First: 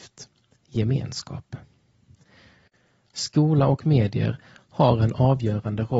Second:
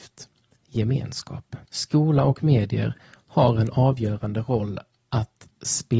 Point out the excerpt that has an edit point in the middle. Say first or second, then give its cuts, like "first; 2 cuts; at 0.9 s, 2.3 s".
second; 1 cut; at 1.7 s